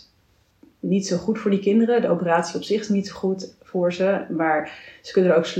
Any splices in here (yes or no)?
no